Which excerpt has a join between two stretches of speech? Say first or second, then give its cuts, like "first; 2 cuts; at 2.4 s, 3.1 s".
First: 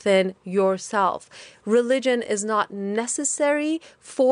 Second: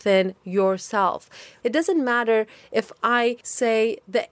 second; 1 cut; at 1.6 s